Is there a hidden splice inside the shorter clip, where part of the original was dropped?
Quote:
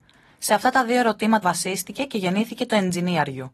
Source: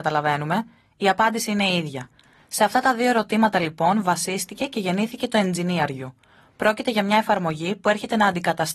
yes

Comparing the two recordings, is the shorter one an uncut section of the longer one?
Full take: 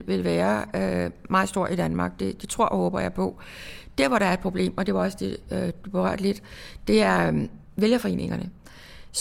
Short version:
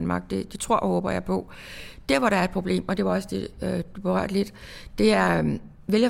yes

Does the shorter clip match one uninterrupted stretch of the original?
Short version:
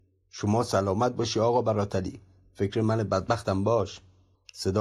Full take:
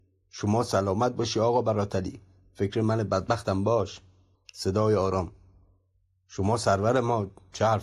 yes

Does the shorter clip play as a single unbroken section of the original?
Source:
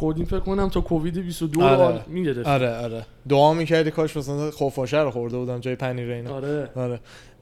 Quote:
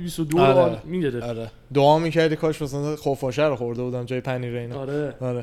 no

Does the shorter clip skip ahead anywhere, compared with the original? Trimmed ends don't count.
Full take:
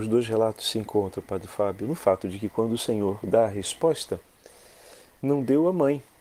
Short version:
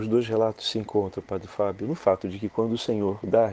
no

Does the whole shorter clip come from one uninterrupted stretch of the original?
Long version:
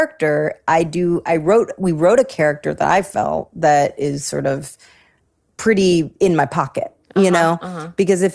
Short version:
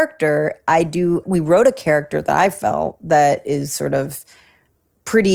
no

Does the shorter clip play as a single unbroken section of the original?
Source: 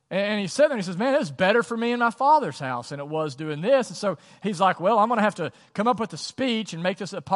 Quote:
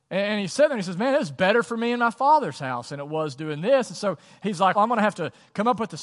no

